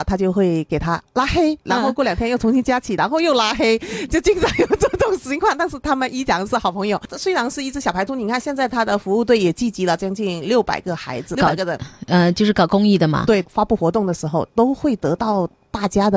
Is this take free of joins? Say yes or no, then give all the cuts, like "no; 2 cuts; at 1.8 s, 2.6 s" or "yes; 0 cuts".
yes; 0 cuts